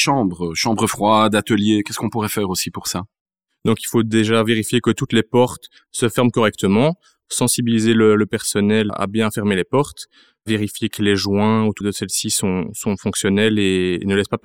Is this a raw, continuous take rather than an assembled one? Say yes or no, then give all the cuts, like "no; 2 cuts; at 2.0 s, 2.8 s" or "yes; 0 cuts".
no; 2 cuts; at 8.9 s, 11.8 s